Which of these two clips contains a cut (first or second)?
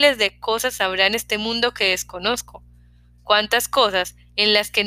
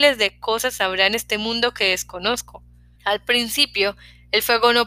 second